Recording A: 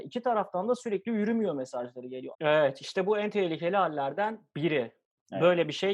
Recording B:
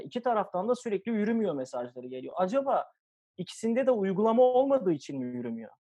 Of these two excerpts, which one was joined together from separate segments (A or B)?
A